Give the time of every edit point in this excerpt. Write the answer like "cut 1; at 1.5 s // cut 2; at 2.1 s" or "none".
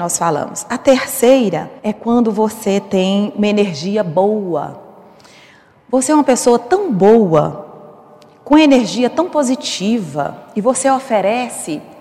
cut 1; at 1.8 s